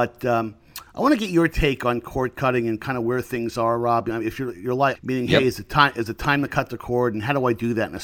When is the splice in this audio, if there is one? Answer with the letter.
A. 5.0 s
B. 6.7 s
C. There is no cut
A